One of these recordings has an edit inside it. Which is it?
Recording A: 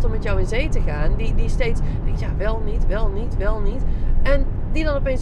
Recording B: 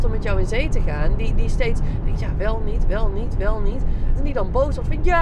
B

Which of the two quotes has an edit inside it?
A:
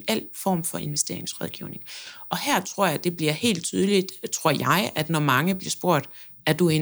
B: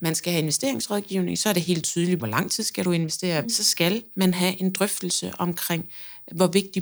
B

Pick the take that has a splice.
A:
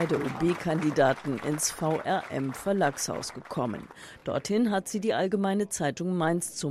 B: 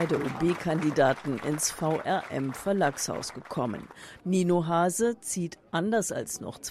B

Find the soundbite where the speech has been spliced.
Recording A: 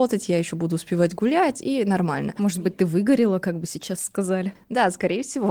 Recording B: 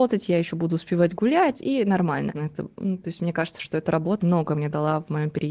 B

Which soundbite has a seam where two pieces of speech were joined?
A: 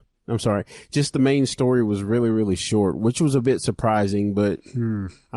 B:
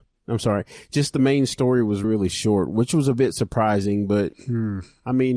B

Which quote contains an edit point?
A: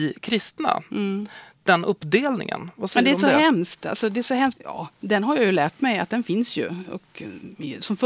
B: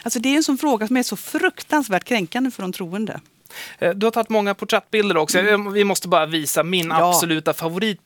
A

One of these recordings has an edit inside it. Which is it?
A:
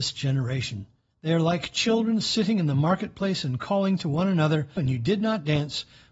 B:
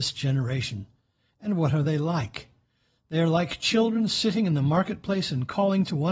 A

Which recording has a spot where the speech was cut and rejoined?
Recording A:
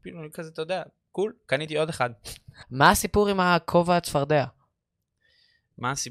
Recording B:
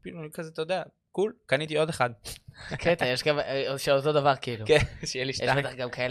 A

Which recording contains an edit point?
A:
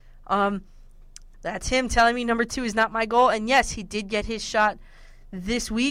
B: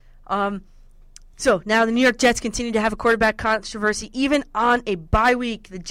A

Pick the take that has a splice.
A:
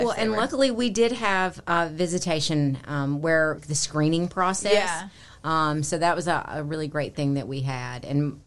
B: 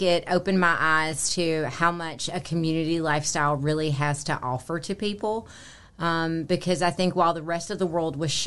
A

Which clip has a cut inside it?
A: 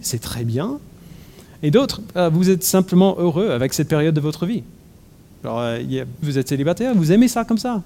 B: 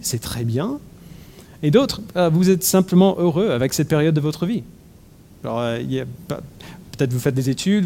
A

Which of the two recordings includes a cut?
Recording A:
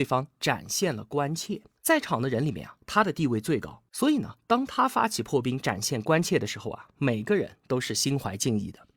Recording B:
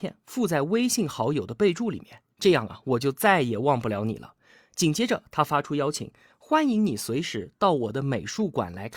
A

